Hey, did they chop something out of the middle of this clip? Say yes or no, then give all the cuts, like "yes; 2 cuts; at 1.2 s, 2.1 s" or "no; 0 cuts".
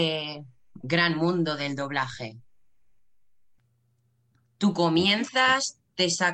no; 0 cuts